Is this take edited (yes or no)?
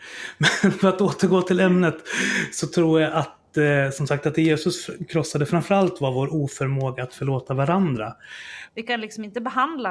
yes